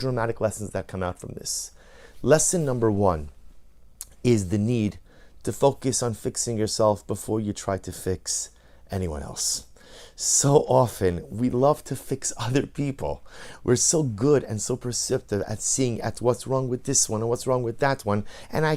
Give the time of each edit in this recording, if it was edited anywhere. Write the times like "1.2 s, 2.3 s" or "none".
none